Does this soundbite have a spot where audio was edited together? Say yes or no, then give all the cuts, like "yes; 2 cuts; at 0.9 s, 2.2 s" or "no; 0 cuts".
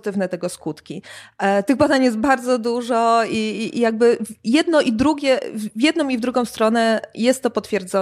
no; 0 cuts